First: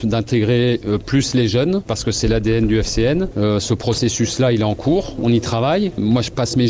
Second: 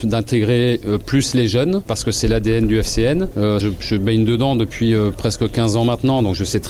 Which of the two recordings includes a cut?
second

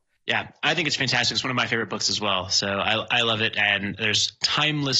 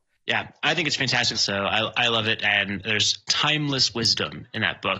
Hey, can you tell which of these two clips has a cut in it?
second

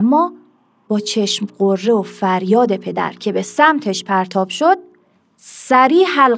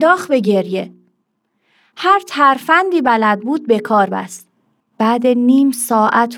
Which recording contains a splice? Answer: second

